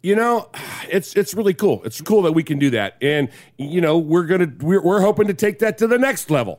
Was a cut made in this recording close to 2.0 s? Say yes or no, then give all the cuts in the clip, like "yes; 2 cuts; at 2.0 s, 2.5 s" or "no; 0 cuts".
yes; 1 cut; at 2.0 s